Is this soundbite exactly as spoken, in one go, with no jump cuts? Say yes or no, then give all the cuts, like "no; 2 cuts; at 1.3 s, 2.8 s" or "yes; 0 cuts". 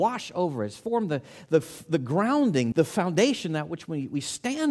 no; 1 cut; at 2.7 s